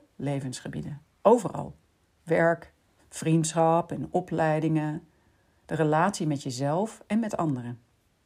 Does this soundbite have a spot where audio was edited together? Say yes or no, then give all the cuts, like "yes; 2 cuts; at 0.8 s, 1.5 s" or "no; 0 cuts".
yes; 1 cut; at 3.0 s